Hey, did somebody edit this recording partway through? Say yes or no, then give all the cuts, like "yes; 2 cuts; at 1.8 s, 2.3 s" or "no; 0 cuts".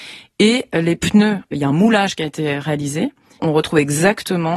yes; 1 cut; at 3.4 s